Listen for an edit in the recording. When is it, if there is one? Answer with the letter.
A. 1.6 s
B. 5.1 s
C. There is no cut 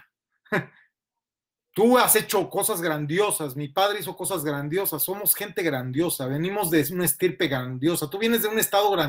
A